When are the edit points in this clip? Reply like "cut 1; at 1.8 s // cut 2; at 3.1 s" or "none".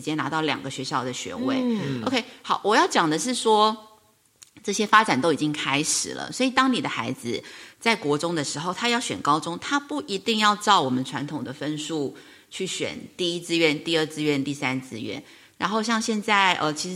cut 1; at 15.6 s